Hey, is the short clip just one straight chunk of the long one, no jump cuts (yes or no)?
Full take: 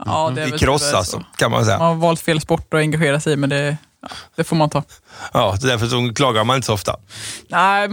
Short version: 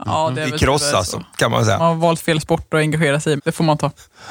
no